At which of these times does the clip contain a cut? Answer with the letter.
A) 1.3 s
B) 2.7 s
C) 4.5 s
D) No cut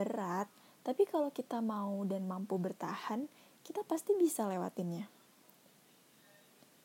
D